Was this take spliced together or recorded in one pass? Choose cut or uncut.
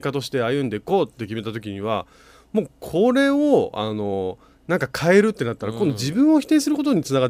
uncut